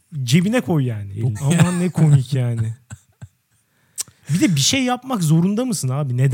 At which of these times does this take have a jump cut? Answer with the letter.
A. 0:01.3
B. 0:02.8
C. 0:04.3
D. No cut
A